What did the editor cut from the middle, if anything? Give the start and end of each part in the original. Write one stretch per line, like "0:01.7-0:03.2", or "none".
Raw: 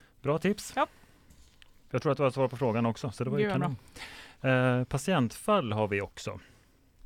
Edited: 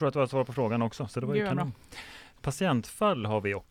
0:04.4-0:04.9